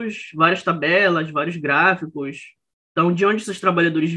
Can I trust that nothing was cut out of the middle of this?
yes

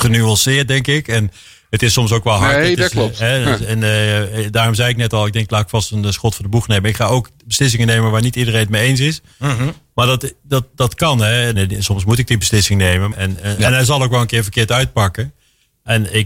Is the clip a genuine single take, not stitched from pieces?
no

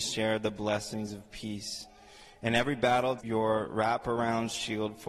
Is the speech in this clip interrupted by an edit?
yes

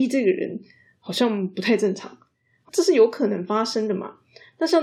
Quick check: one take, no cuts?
no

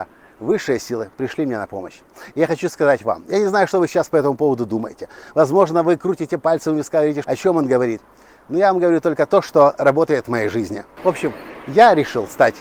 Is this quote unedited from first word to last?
no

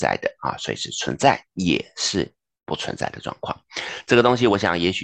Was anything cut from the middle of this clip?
yes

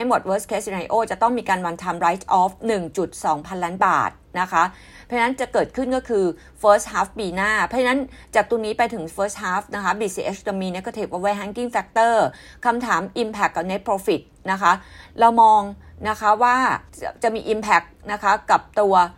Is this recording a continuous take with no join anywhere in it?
no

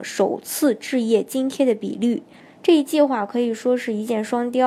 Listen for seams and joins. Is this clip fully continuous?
no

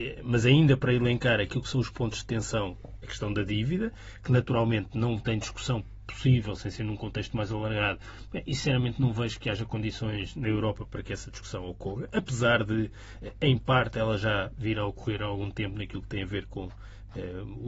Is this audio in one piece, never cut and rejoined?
yes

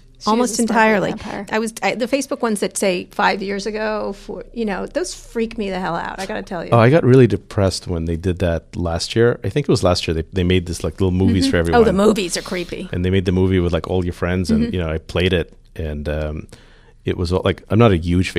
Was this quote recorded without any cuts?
yes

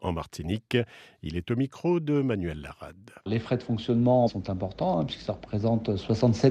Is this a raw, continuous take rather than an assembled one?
no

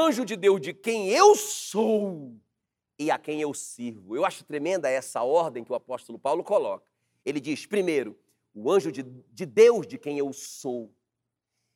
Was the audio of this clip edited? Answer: no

